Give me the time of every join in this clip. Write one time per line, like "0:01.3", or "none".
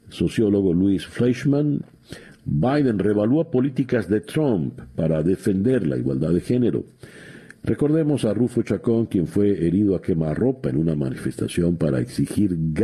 0:07.5

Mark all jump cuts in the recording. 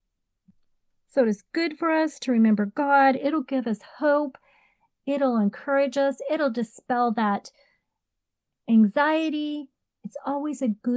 none

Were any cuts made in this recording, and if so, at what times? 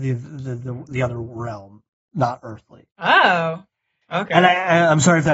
none

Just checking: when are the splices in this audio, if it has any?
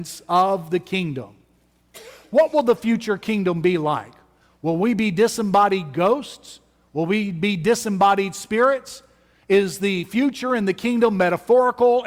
none

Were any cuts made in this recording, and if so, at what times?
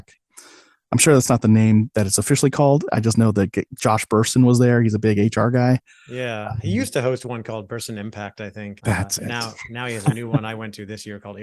0:08.8

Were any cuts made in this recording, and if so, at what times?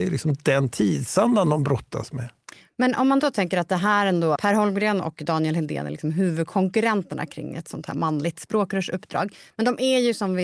0:04.4

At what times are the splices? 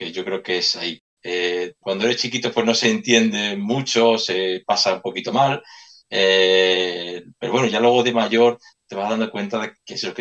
0:01.2

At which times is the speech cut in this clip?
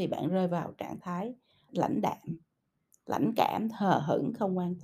0:01.7

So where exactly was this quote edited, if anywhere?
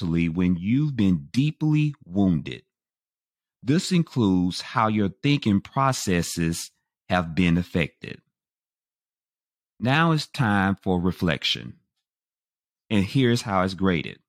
0:12.7

